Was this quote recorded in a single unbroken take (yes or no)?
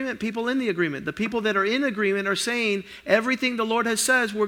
yes